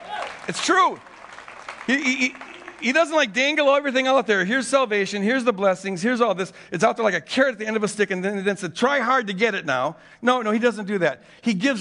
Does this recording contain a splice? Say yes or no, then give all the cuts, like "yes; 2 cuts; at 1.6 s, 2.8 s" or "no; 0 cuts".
no; 0 cuts